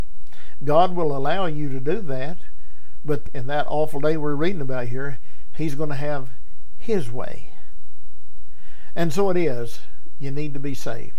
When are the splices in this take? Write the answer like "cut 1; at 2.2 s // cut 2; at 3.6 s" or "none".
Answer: cut 1; at 3.3 s